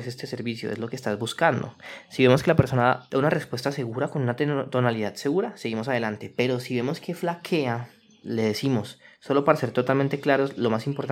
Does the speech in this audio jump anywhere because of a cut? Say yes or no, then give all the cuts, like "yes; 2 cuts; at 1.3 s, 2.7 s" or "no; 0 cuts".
no; 0 cuts